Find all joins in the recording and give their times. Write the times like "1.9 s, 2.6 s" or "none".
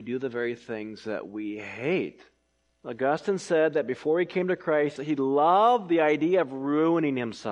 2.7 s, 5.0 s